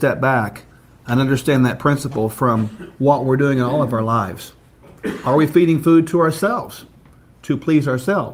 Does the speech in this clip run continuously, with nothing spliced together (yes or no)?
yes